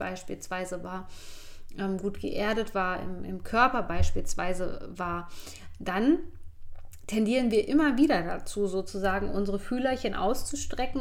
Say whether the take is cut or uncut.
uncut